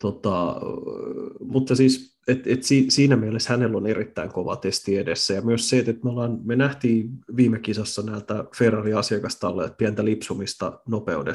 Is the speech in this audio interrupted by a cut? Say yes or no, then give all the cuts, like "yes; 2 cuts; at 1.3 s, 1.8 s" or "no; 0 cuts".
no; 0 cuts